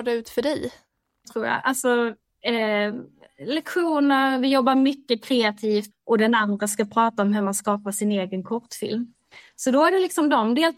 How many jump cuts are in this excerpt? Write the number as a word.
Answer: two